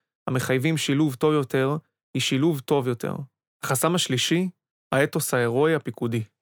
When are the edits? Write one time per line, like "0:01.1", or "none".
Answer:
0:03.5